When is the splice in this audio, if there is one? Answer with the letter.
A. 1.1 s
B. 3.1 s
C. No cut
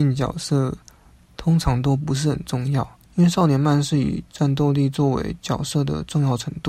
B